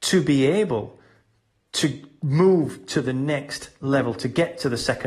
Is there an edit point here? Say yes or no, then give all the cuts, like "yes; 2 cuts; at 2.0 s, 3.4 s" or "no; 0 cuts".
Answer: no; 0 cuts